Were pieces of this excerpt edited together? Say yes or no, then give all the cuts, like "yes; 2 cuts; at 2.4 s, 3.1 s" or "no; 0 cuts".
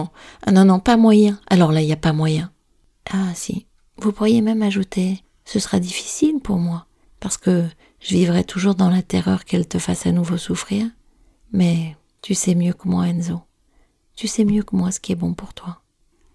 no; 0 cuts